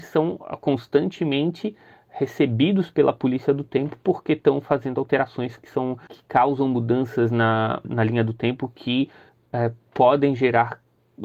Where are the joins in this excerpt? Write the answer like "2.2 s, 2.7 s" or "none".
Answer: 6.1 s, 7.8 s